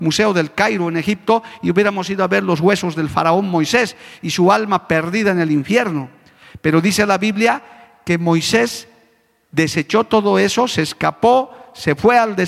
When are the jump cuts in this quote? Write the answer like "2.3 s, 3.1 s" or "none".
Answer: none